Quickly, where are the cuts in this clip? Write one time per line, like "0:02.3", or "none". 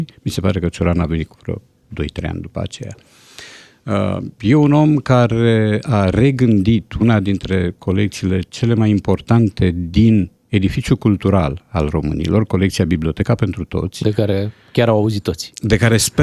none